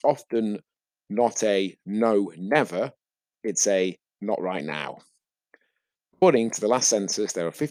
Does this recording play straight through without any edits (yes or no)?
yes